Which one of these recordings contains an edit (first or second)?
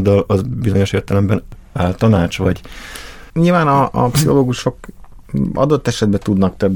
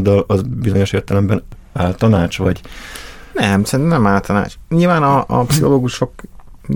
first